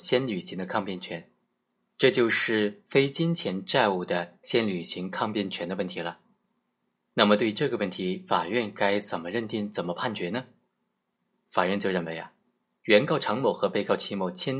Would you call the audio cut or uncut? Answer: cut